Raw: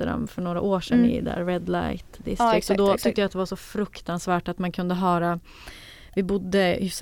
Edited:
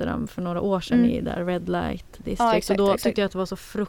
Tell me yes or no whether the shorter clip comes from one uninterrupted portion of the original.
yes